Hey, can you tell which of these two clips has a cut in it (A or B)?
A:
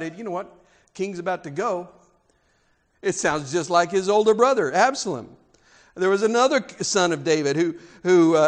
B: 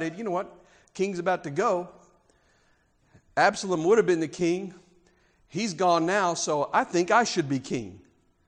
A